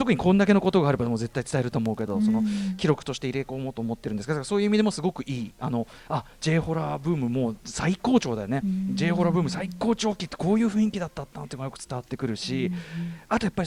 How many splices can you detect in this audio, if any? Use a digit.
0